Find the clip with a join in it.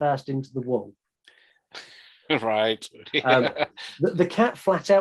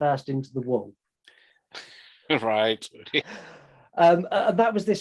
second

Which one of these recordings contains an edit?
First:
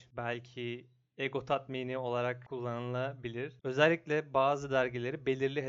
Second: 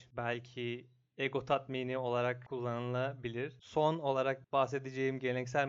first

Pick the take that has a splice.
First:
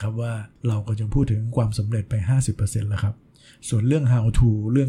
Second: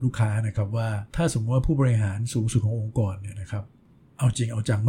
second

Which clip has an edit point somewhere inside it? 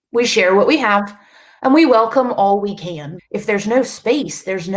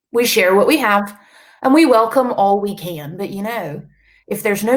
first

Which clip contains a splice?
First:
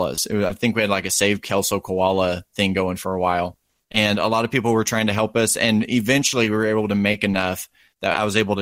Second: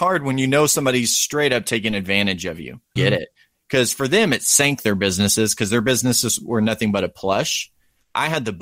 second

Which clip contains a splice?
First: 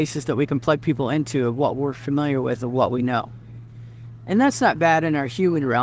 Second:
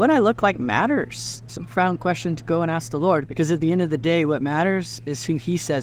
second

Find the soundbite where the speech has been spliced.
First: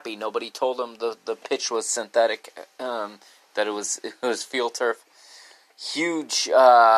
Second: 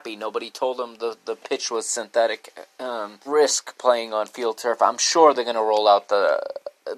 second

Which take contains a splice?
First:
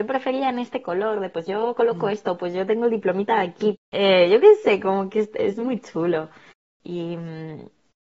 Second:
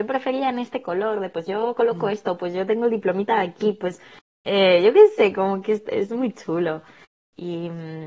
first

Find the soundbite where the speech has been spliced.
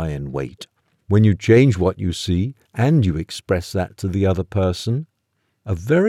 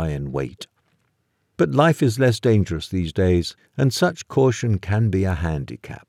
first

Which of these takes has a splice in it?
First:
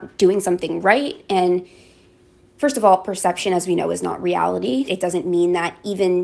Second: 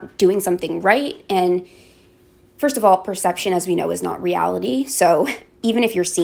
first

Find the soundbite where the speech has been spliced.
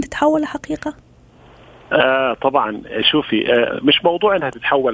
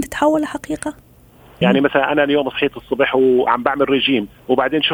second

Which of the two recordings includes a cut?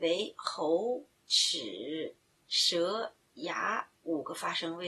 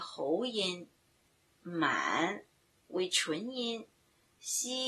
first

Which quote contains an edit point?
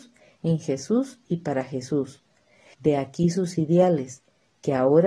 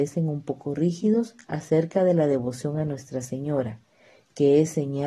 first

